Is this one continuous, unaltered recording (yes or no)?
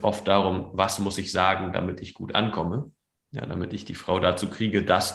yes